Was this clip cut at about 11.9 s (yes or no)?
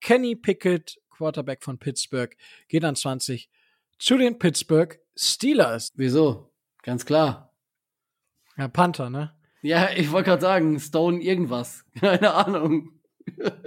no